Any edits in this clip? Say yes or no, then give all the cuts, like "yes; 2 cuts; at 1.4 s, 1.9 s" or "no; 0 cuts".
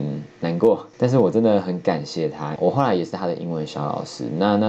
yes; 2 cuts; at 0.9 s, 2.6 s